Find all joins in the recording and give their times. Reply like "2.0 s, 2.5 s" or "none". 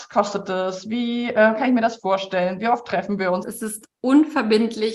3.4 s